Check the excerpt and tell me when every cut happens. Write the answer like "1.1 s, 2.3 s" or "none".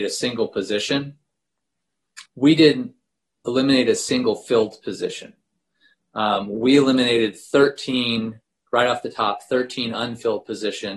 2.3 s